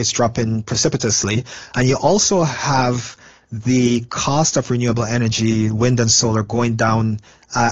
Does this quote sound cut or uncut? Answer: uncut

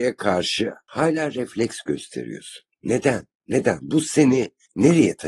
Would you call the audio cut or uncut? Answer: uncut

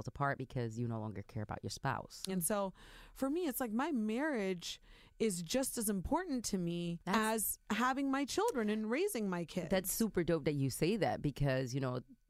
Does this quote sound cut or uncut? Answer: cut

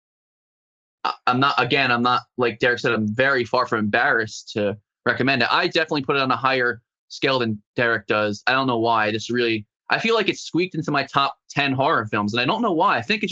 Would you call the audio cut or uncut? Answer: uncut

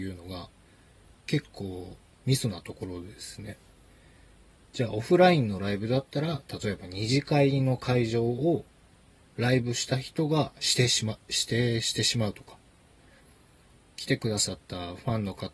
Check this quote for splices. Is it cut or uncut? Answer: uncut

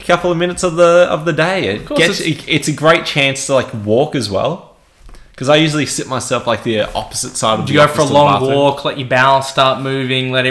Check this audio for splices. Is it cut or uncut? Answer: uncut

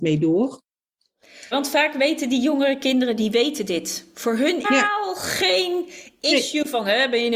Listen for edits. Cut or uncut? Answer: cut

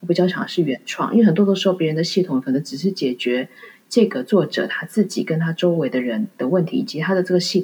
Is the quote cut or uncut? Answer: uncut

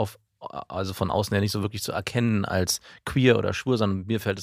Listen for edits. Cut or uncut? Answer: uncut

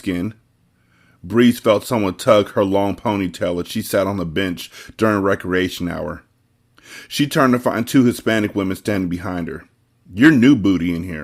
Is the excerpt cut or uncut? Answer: uncut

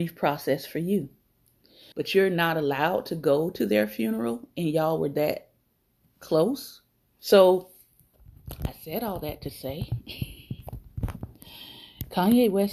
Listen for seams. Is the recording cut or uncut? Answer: cut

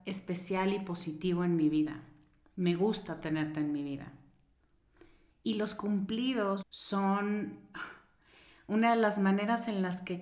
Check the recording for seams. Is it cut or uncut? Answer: cut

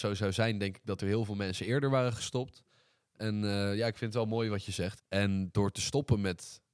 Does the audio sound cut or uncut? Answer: cut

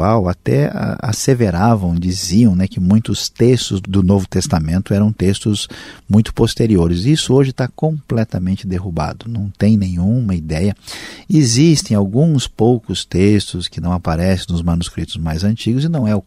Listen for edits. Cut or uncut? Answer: cut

